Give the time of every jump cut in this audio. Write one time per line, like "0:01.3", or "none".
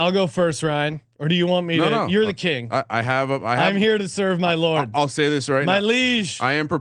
none